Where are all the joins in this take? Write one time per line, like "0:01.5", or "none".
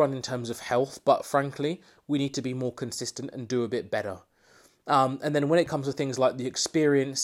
none

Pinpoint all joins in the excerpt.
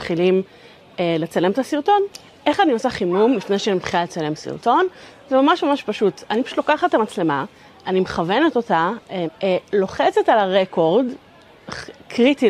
0:09.3

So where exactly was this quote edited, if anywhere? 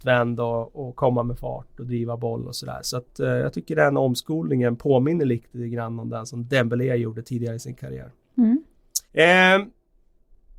0:09.0

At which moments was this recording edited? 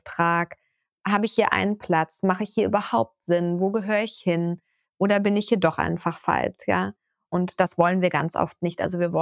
0:04.8
0:07.3

